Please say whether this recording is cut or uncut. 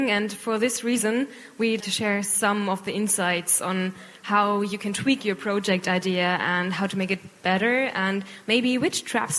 cut